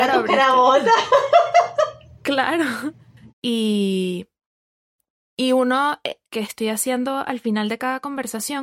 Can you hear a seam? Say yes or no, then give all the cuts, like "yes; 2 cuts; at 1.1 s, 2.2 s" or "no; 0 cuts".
yes; 2 cuts; at 3.3 s, 6.3 s